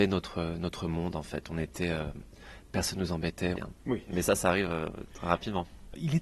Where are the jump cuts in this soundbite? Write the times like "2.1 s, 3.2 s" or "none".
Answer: 3.5 s, 5.1 s